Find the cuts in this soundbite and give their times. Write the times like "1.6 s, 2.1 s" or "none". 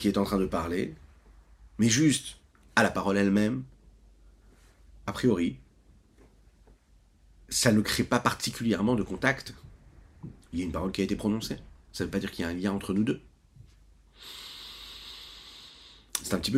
none

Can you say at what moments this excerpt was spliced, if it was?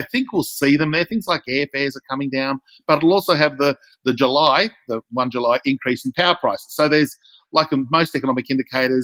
none

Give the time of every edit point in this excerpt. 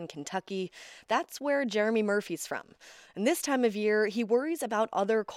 none

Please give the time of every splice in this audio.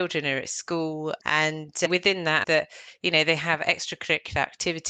1.2 s, 2.4 s

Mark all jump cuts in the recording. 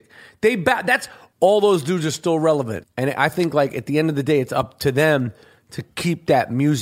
1.3 s, 2.8 s

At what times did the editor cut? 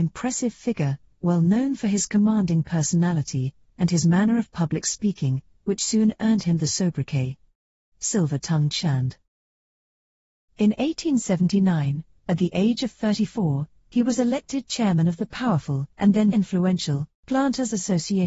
16.3 s

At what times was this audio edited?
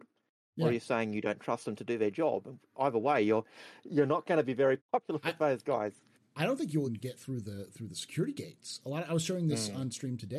4.8 s, 6.9 s

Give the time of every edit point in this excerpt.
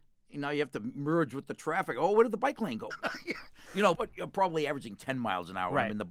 2.9 s, 3.9 s

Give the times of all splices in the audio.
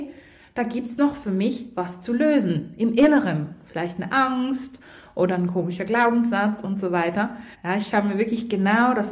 7.5 s

